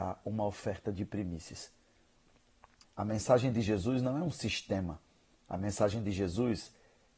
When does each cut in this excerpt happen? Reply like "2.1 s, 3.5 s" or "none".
2.8 s